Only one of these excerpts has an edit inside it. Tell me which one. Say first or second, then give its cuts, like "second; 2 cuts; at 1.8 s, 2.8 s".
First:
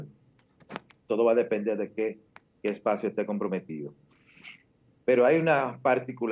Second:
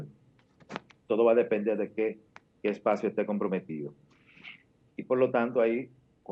second; 1 cut; at 4.9 s